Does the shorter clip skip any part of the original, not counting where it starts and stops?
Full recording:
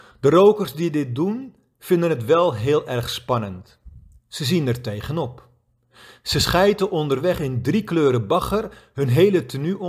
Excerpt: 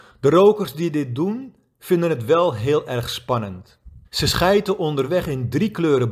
yes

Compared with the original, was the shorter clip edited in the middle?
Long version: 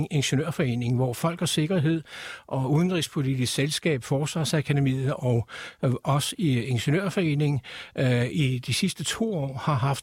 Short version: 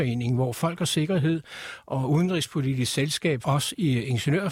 yes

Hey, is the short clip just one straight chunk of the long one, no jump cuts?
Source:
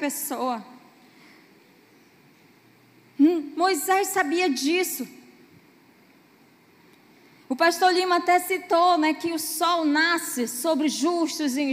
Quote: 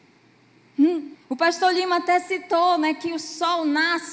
no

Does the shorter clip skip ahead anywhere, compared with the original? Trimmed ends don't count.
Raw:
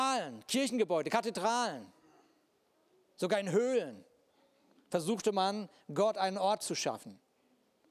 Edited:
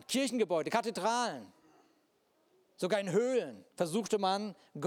yes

